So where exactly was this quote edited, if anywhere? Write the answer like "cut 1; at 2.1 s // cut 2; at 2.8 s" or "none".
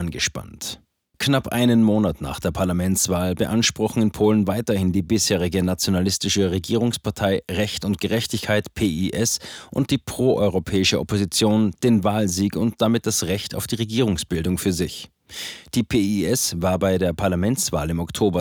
cut 1; at 1.1 s